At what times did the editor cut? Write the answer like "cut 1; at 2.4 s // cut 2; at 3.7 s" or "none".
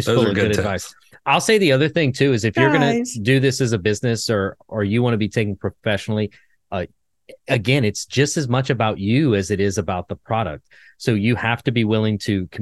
none